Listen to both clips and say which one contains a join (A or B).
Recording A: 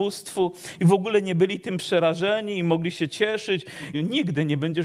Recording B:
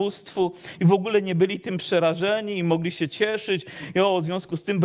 A